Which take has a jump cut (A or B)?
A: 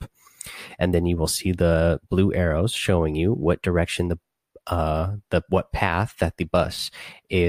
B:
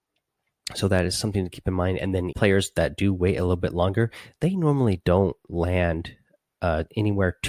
B